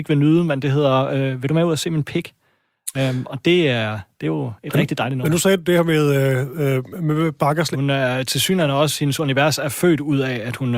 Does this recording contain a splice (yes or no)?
yes